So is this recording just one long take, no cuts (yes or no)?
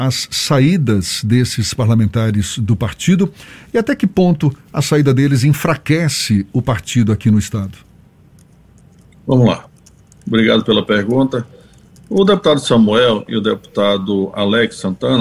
yes